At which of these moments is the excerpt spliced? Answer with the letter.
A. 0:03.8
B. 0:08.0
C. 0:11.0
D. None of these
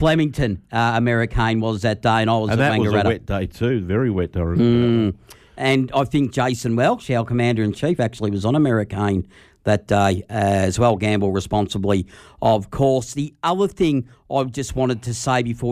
D